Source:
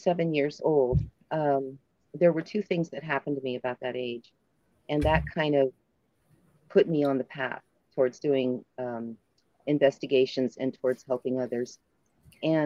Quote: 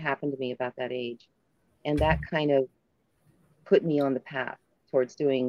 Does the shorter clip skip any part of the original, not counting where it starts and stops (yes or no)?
no